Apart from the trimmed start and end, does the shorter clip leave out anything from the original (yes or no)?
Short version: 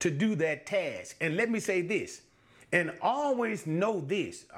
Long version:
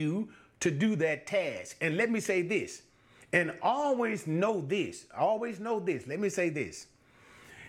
no